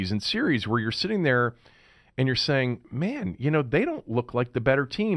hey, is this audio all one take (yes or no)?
yes